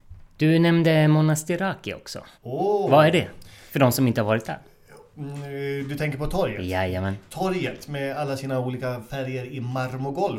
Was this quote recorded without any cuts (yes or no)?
no